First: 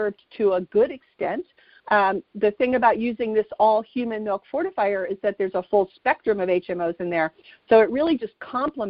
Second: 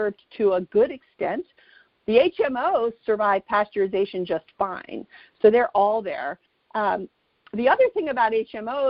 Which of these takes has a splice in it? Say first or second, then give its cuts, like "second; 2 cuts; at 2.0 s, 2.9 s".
first; 1 cut; at 1.8 s